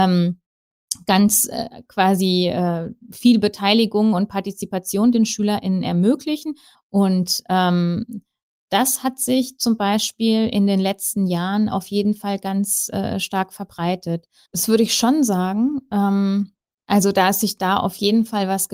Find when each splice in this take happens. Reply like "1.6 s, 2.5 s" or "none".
6.7 s, 14.5 s